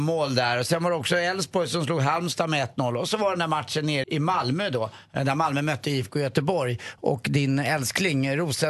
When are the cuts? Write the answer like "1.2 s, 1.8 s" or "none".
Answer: 4.0 s